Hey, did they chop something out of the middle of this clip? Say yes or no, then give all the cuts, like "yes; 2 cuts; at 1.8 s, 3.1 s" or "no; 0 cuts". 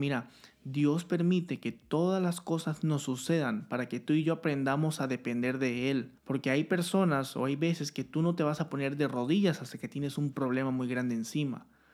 yes; 1 cut; at 6.2 s